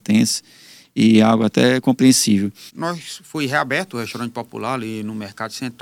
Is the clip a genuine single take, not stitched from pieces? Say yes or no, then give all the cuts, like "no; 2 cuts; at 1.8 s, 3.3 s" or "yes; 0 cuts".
no; 1 cut; at 2.7 s